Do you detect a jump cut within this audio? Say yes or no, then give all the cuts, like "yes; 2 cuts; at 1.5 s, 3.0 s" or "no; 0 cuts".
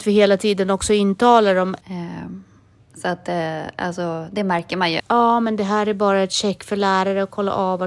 yes; 2 cuts; at 1.8 s, 5.0 s